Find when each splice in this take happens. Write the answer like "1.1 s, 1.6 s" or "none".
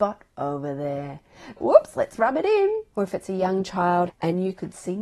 1.6 s, 2.9 s, 4.1 s